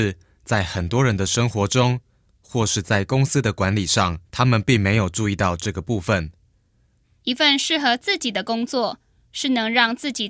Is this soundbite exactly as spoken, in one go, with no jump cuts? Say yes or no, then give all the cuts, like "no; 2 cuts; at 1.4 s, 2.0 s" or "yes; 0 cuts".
no; 2 cuts; at 4.3 s, 7.0 s